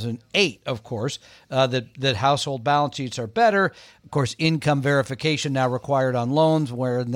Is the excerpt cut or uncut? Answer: uncut